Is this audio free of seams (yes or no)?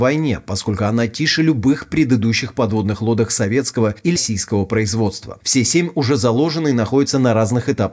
no